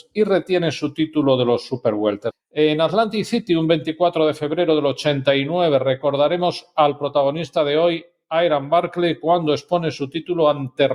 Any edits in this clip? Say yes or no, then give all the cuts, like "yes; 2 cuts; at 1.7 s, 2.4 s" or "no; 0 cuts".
yes; 1 cut; at 2.3 s